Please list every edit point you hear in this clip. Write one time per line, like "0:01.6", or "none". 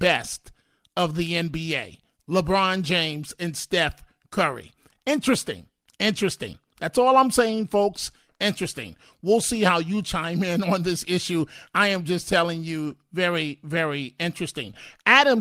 none